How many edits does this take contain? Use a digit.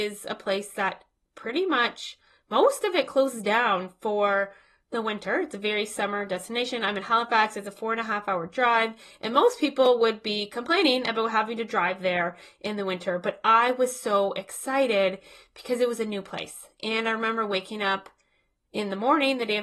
0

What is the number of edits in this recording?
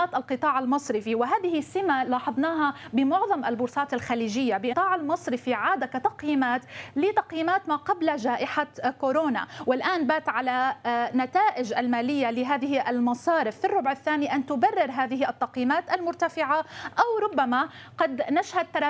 1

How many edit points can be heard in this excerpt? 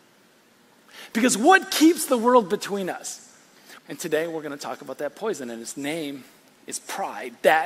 1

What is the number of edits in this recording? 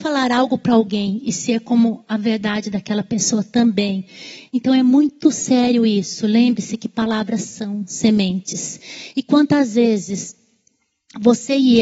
0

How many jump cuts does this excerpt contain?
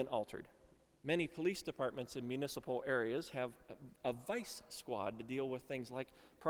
1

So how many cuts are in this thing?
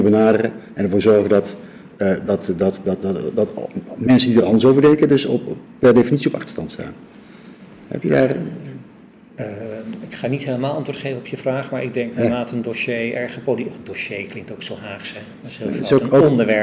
0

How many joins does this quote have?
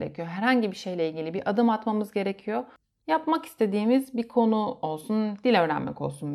1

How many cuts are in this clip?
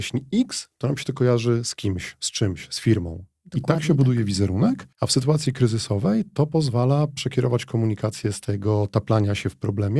1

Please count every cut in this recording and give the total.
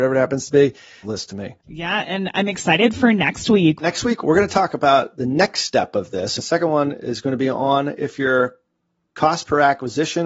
3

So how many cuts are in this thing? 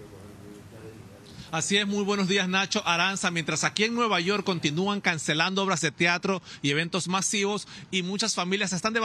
0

